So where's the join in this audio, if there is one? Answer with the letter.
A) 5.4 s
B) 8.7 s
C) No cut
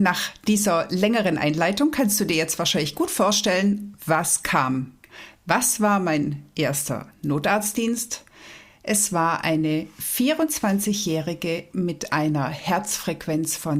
C